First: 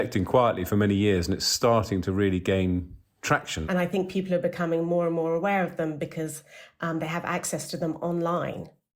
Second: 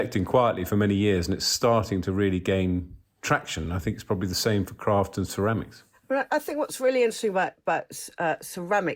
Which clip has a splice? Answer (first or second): first